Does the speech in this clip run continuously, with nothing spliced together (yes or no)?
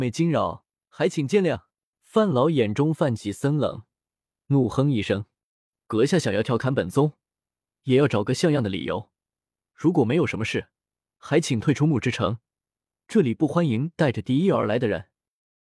no